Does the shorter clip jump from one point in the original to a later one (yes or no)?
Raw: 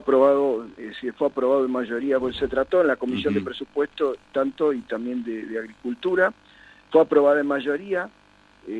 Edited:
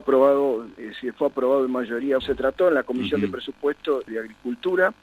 yes